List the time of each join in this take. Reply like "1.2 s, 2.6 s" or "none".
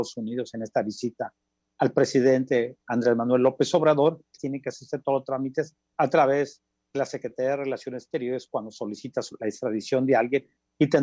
4.4 s, 5.9 s